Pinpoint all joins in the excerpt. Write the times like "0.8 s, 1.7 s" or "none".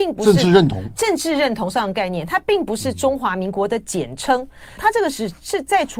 4.8 s